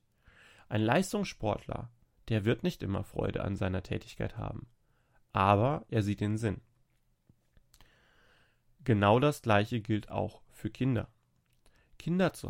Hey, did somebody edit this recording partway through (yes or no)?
no